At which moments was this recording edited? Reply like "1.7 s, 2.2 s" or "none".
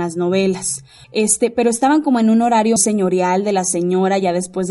1.0 s, 2.8 s